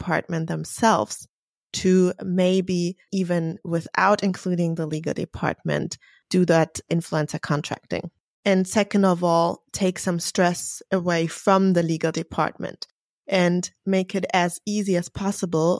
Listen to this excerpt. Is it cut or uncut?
cut